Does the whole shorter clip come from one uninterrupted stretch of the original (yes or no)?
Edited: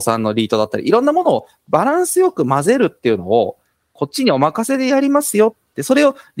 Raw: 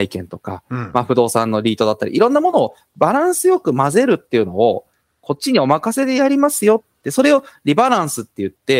yes